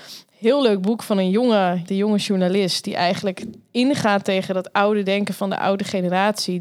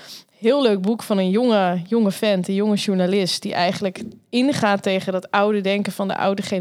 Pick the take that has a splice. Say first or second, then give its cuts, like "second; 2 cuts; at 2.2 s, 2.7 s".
first; 1 cut; at 1.9 s